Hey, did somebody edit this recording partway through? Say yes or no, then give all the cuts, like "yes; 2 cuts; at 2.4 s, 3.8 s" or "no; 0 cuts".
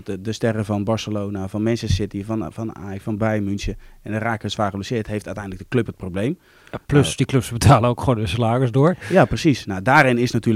no; 0 cuts